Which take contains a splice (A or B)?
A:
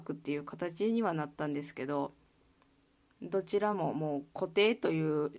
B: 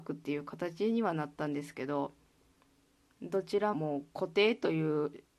B